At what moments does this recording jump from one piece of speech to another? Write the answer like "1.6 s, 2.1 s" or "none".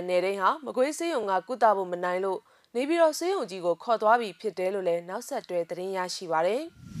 none